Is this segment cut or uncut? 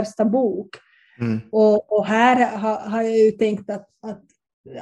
uncut